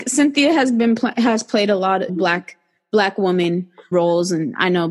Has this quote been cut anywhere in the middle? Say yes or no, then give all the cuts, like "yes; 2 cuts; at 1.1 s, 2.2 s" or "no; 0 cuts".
yes; 2 cuts; at 2.1 s, 3.9 s